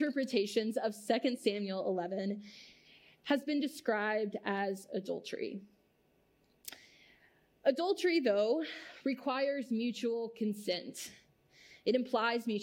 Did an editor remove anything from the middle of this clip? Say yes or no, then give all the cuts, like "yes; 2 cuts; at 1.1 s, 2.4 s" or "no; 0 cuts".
no; 0 cuts